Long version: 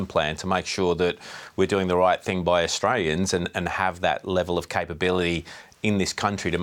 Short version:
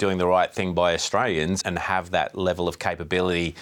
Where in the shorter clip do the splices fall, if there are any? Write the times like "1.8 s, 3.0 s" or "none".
1.6 s